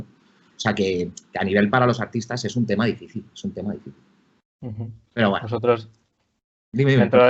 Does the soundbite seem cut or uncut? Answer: uncut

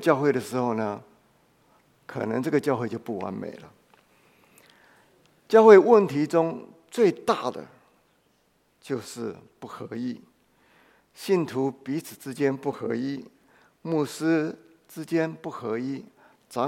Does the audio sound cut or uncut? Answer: uncut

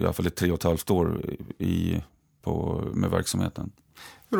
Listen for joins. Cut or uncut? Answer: cut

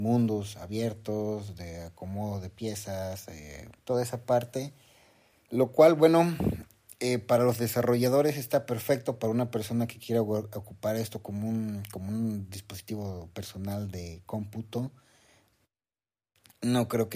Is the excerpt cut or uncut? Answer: cut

